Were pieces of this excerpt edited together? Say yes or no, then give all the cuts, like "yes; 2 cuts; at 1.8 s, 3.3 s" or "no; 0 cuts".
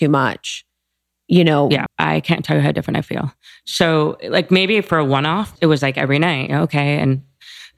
yes; 2 cuts; at 1.9 s, 5.6 s